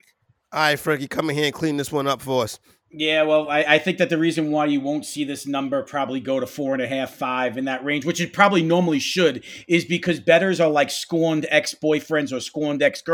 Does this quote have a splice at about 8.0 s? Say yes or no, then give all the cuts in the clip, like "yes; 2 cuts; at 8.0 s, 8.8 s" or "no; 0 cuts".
no; 0 cuts